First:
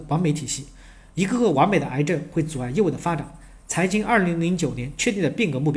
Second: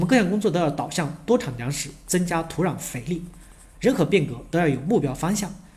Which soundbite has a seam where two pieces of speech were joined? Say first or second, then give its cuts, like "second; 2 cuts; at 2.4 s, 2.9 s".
second; 1 cut; at 3.7 s